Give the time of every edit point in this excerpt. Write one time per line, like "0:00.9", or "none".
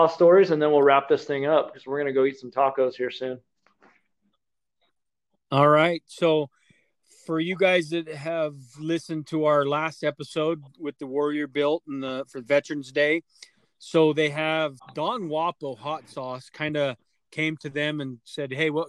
0:14.8